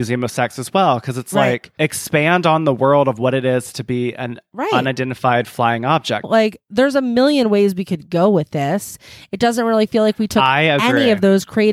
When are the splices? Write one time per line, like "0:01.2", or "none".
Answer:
0:06.2